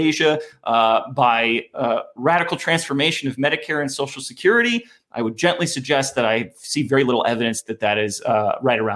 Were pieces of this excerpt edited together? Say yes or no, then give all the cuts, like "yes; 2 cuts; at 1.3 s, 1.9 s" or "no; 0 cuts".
no; 0 cuts